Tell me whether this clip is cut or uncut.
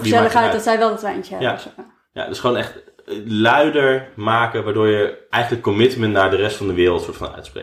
cut